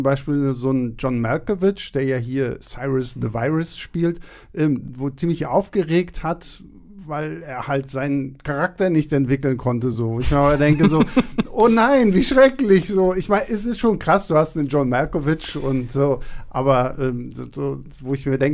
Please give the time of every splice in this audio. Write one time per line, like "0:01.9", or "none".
none